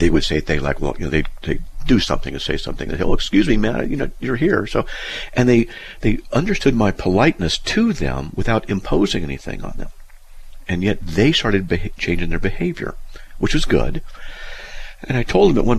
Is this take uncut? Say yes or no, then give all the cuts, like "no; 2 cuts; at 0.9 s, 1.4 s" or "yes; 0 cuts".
yes; 0 cuts